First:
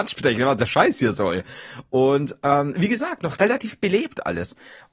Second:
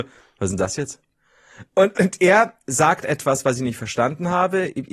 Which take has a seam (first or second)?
second